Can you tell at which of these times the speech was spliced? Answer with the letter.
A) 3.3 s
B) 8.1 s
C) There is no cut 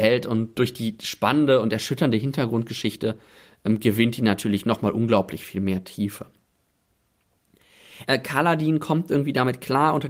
B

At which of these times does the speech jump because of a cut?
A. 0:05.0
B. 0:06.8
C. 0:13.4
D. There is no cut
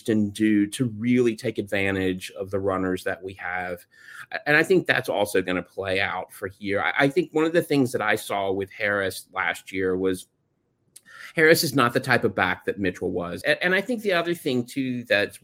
C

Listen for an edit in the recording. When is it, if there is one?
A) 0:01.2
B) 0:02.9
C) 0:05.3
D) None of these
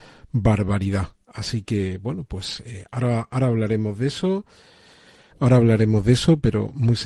C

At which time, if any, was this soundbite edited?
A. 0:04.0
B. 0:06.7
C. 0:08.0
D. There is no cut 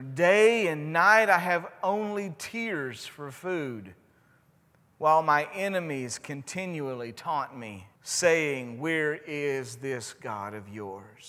C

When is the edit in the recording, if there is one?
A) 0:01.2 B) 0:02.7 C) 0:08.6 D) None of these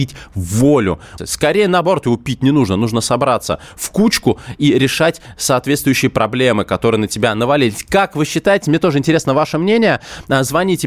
A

